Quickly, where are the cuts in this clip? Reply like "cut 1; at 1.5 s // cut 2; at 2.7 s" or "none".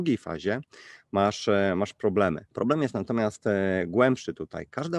cut 1; at 2.5 s

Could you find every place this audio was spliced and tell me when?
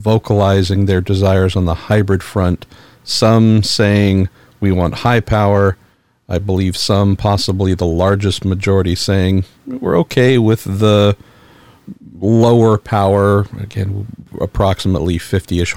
none

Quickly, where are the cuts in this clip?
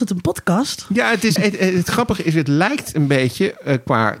cut 1; at 1.4 s

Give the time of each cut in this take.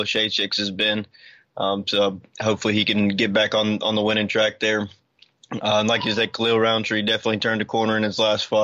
none

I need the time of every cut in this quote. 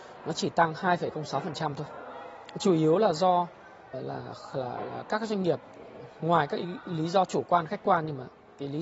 cut 1; at 3.9 s

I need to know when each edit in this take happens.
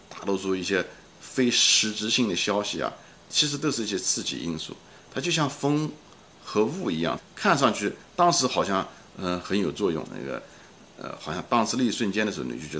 cut 1; at 7.2 s // cut 2; at 10.1 s

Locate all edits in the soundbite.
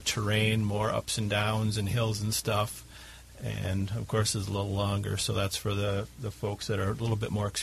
none

